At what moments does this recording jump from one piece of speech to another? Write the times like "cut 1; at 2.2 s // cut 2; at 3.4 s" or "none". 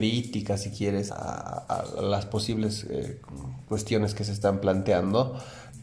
cut 1; at 1.1 s